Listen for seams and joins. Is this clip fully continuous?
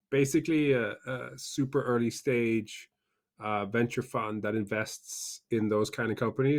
yes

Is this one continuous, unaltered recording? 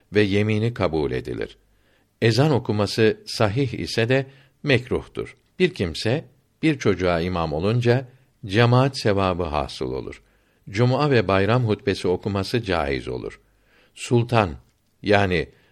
no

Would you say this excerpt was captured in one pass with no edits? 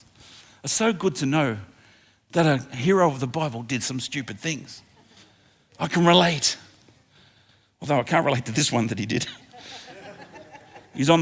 yes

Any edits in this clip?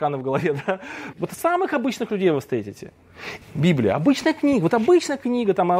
yes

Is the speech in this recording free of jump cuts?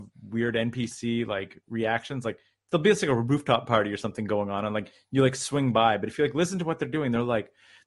yes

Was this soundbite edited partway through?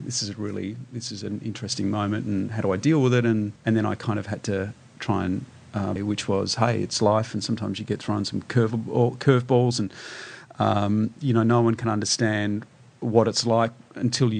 yes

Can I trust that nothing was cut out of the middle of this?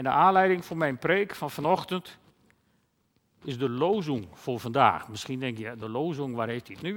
yes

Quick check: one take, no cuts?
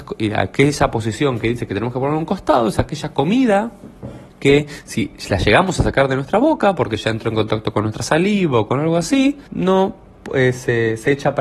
no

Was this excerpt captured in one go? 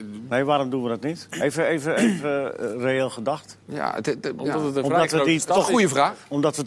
no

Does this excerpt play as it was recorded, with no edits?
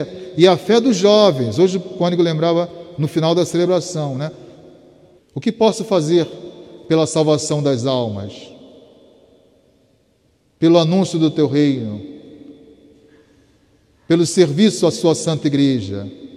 no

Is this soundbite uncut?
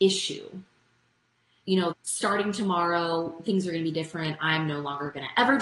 no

